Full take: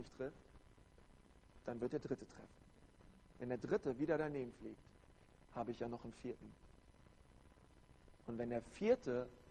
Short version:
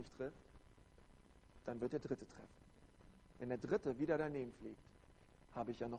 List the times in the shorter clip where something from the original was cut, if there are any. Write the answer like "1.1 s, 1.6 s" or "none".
none